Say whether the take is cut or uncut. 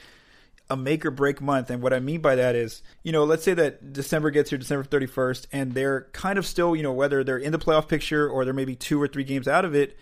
cut